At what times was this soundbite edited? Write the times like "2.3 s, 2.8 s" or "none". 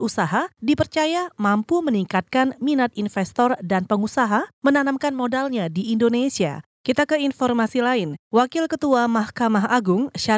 6.7 s

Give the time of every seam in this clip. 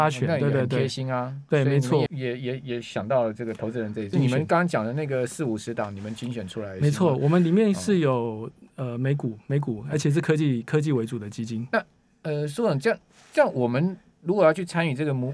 2.1 s, 4.1 s

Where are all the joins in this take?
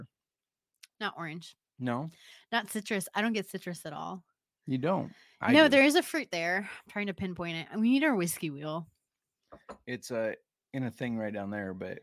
none

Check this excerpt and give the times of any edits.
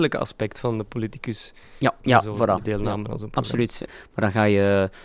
2.0 s, 3.9 s

